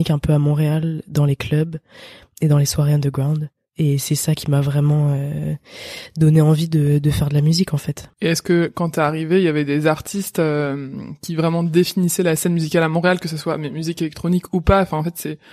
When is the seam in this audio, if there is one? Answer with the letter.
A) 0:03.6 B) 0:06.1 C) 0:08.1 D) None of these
C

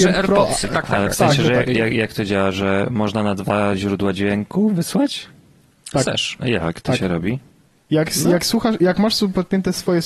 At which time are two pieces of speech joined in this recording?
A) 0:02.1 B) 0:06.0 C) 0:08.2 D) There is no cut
B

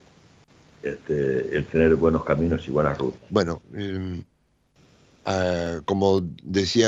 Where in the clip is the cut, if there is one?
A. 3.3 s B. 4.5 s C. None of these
A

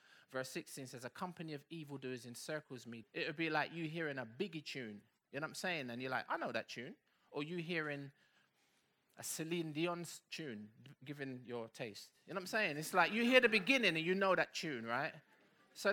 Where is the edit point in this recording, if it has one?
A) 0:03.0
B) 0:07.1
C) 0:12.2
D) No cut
A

